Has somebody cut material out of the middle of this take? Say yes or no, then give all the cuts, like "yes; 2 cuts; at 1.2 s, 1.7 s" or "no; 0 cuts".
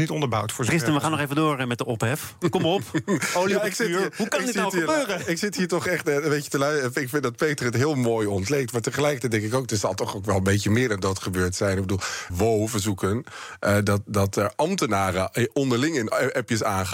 yes; 1 cut; at 12.3 s